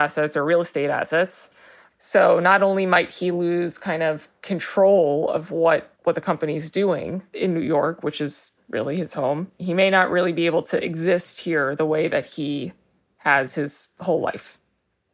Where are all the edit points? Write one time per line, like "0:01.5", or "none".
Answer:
0:01.8
0:05.9